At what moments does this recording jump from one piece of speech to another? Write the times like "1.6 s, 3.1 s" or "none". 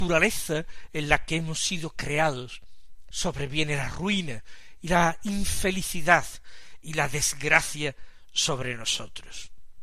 3.1 s